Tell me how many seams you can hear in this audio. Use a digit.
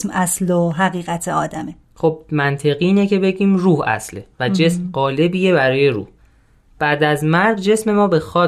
1